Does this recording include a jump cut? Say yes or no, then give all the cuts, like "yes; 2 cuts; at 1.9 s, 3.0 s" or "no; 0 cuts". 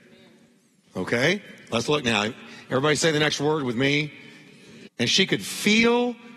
yes; 1 cut; at 4.9 s